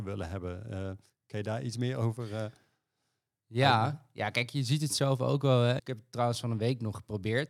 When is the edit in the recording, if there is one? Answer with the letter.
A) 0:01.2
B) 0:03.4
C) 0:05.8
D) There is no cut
C